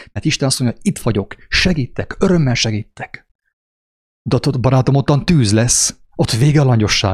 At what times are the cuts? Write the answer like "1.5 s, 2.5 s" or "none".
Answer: 4.3 s